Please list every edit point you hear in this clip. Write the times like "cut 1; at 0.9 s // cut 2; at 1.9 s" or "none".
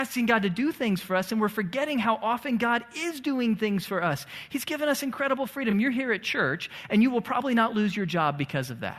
none

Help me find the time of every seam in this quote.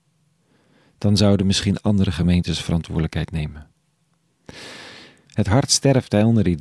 cut 1; at 5.2 s

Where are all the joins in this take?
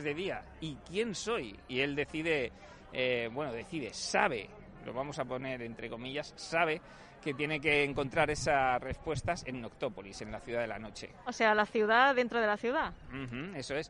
cut 1; at 11.3 s

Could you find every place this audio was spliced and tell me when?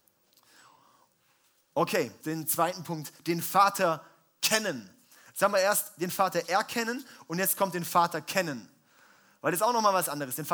cut 1; at 2.2 s

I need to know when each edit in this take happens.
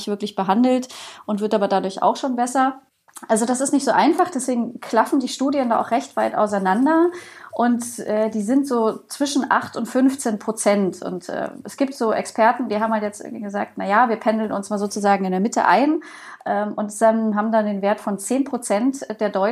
none

